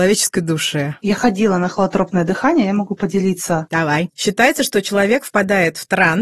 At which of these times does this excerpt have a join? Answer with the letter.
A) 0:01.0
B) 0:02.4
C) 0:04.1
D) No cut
C